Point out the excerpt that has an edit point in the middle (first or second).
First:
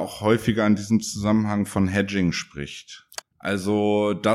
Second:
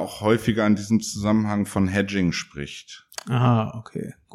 first